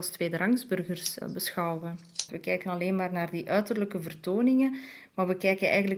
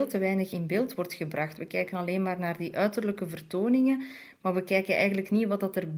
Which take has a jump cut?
first; 1 cut; at 2.3 s

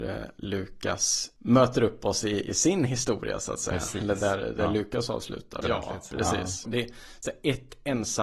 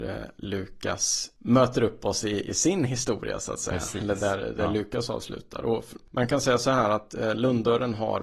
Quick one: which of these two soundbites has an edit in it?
first; 2 cuts; at 5.6 s, 6.6 s

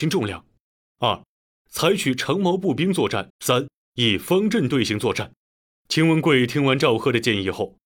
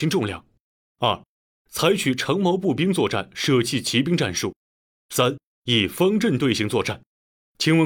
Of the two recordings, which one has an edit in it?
first; 1 cut; at 3.3 s

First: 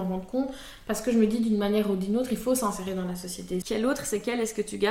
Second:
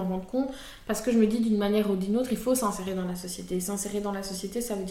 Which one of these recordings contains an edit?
first; 1 cut; at 3.6 s

